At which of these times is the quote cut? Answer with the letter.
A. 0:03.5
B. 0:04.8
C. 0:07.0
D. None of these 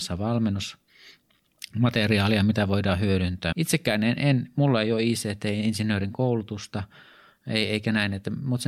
A